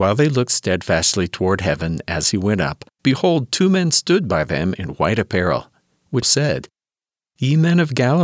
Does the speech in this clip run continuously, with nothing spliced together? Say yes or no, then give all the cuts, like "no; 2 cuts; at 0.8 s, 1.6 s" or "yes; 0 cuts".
no; 2 cuts; at 2.9 s, 6.2 s